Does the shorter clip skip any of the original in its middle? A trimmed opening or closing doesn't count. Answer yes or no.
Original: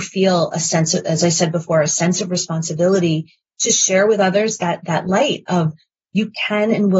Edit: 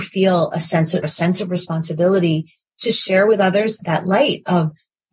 yes